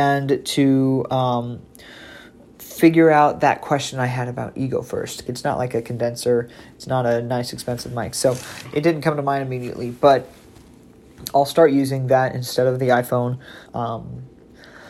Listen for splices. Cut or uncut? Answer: cut